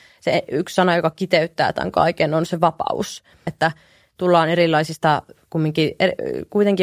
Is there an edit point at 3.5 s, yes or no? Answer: yes